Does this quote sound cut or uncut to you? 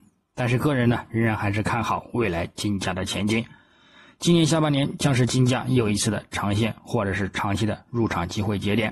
uncut